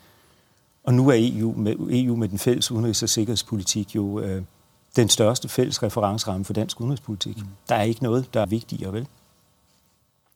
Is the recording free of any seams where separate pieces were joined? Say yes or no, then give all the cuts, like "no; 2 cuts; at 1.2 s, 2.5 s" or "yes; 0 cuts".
no; 1 cut; at 8.4 s